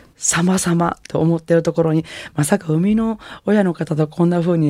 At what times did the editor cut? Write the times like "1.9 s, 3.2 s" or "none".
1.0 s